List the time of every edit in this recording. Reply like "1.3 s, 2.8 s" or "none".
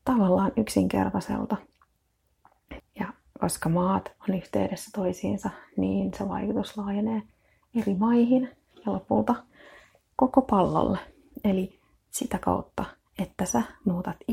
2.8 s